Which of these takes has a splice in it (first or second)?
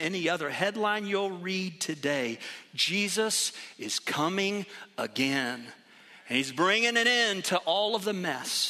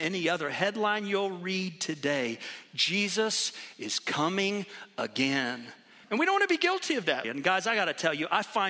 second